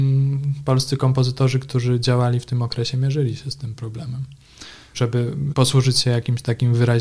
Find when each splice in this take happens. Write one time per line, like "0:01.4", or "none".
none